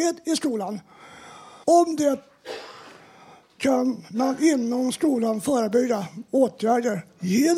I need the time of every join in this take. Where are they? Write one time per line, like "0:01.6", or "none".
0:01.6